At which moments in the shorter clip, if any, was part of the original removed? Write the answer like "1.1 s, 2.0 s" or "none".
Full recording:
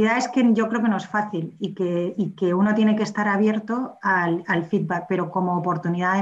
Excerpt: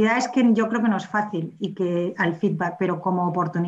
2.1 s